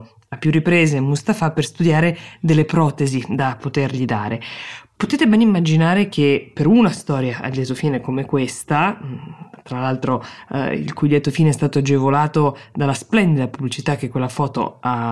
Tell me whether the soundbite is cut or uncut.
uncut